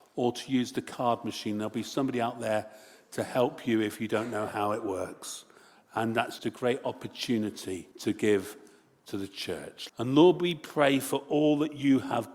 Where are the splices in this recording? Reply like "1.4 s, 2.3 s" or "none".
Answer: 6.4 s, 7.9 s, 9.9 s

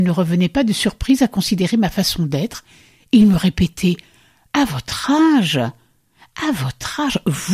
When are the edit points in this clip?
none

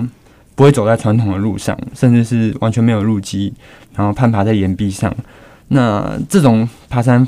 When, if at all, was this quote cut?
none

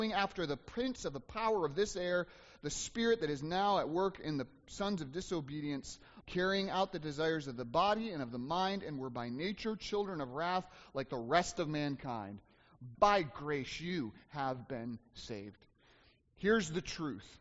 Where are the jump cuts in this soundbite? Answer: 6.2 s, 13.0 s

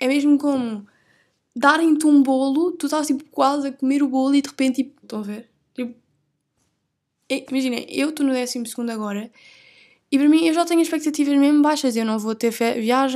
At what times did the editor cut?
5.0 s, 7.5 s

